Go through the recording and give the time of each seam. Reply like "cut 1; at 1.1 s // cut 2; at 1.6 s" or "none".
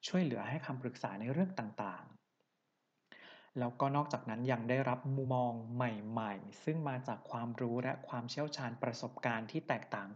cut 1; at 5.2 s